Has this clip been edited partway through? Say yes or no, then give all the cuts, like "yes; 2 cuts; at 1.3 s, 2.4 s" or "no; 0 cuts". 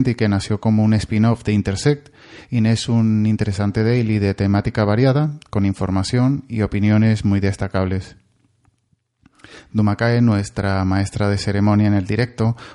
no; 0 cuts